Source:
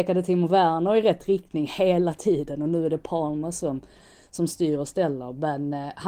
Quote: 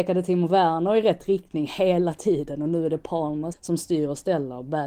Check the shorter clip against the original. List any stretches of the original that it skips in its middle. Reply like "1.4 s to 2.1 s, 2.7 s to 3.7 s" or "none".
3.5 s to 4.2 s